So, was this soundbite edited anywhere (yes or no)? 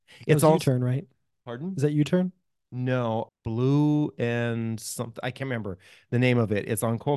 yes